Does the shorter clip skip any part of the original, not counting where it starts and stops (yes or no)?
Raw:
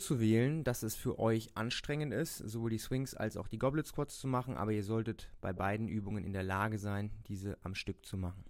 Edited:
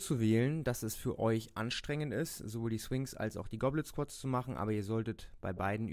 no